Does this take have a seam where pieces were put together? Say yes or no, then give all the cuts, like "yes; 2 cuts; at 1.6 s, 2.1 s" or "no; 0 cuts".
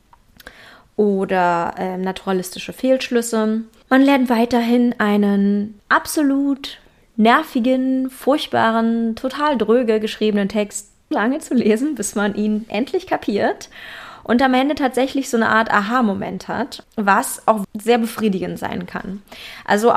yes; 2 cuts; at 11.1 s, 17.6 s